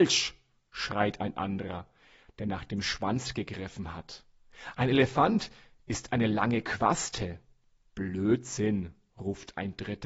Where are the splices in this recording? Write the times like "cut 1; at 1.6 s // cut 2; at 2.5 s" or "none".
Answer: none